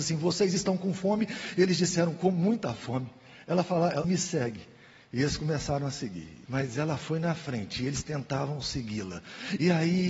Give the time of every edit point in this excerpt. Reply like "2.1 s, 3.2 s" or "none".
4.0 s, 6.5 s